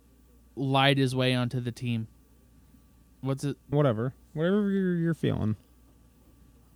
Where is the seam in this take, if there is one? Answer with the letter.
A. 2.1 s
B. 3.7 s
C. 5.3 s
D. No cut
B